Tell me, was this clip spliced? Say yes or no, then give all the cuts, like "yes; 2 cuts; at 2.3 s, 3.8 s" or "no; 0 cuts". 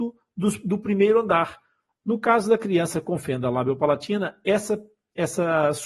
yes; 1 cut; at 2.0 s